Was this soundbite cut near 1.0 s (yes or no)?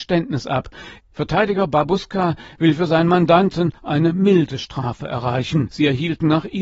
yes